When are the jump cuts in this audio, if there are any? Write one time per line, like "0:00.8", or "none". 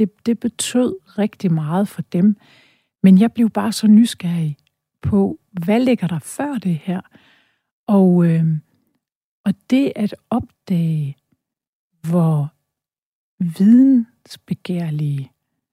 none